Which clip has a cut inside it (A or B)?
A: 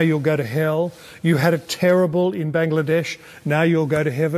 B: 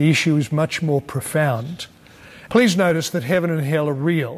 B